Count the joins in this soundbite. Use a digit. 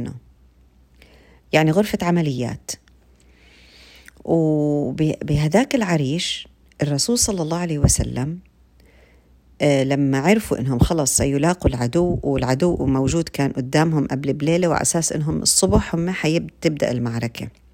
0